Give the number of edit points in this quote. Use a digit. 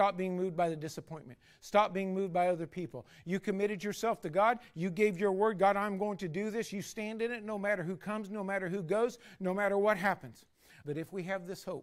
1